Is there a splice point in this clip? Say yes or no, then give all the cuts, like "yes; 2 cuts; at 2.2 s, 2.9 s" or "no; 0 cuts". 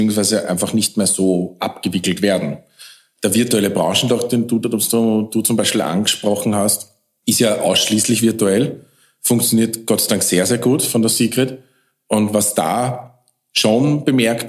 no; 0 cuts